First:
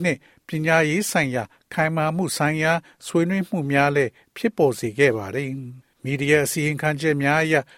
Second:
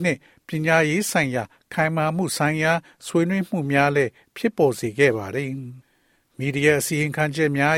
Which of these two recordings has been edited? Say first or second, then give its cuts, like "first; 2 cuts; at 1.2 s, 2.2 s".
first; 1 cut; at 5.9 s